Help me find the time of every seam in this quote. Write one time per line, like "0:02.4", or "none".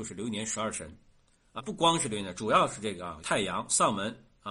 0:01.6
0:03.2